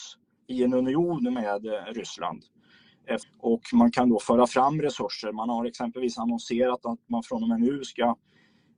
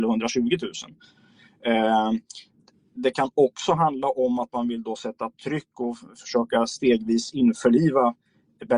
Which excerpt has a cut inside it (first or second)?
first